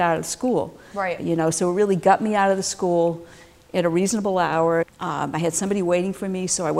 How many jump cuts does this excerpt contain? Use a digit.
2